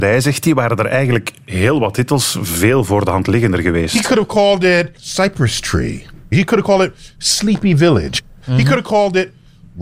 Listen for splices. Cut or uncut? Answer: uncut